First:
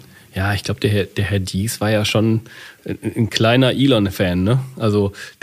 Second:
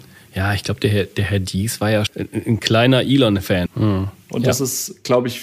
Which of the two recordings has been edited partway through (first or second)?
second